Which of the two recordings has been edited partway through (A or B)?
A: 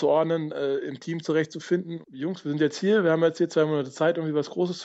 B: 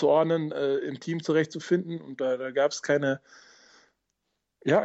A